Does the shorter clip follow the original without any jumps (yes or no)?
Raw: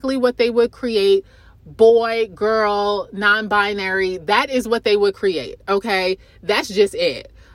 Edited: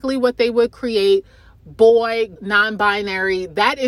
no